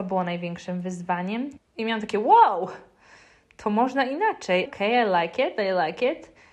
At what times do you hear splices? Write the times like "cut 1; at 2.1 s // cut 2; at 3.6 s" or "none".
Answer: cut 1; at 1.6 s // cut 2; at 4.7 s